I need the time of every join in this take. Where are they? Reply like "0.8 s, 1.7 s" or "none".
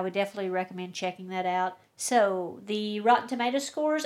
1.8 s